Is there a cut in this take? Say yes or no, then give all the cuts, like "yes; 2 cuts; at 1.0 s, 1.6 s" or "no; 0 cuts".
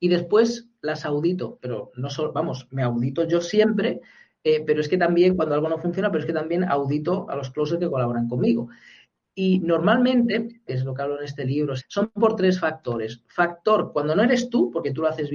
yes; 2 cuts; at 10.7 s, 11.8 s